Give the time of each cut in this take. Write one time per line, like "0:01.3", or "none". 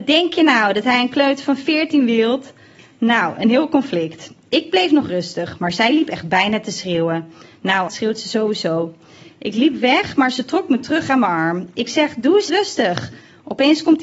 0:07.9
0:12.5

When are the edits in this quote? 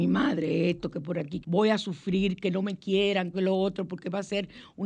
0:01.4
0:03.3

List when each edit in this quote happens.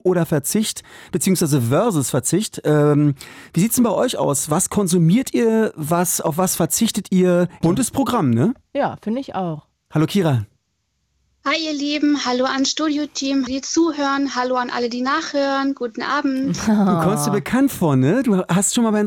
0:07.6
0:09.9
0:13.5

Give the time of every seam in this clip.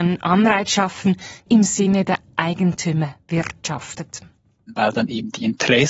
0:01.5

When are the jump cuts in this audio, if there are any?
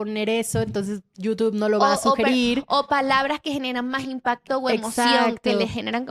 none

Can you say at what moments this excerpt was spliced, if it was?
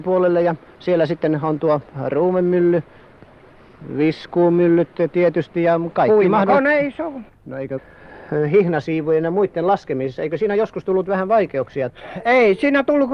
none

